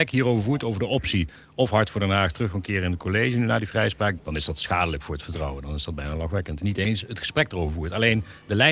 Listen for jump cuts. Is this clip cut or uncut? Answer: cut